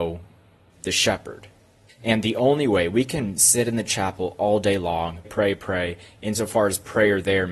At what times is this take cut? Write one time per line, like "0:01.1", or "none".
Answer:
0:01.9
0:05.2